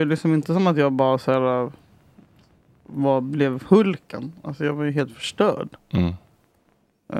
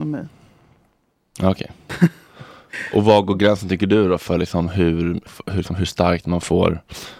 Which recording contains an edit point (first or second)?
second